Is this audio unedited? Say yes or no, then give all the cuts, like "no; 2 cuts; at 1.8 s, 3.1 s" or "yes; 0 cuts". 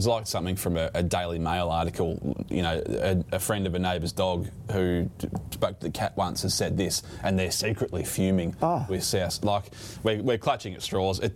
yes; 0 cuts